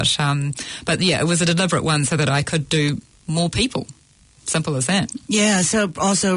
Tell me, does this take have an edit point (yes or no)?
no